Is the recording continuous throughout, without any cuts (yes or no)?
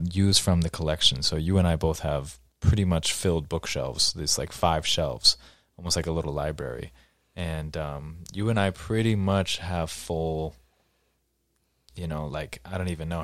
yes